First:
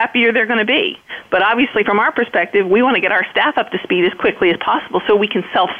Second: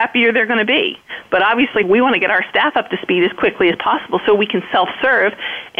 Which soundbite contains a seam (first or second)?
second